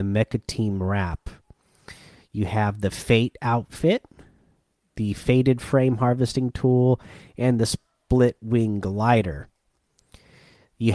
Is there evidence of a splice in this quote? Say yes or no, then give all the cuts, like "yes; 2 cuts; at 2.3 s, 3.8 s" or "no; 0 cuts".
no; 0 cuts